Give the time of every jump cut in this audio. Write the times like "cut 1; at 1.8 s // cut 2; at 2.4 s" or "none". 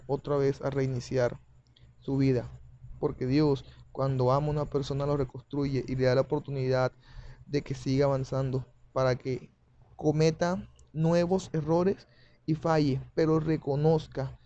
none